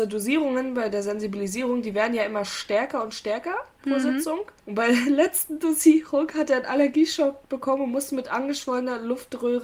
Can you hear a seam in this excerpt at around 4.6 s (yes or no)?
yes